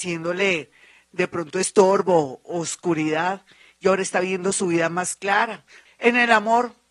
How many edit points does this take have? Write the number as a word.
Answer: one